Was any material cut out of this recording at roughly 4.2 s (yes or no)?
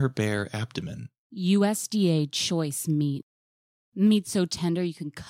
no